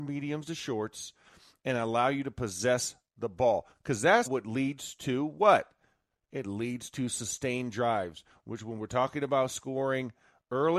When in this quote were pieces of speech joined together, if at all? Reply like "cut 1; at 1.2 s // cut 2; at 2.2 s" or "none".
cut 1; at 4.3 s